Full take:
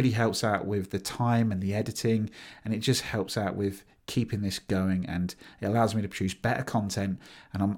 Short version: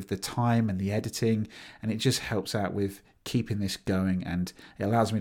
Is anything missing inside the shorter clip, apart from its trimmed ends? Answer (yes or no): no